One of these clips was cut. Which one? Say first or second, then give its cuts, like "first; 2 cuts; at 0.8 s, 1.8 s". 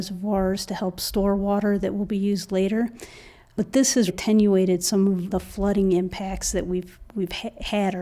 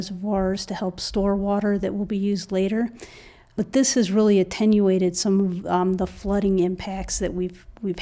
first; 2 cuts; at 4.1 s, 5.3 s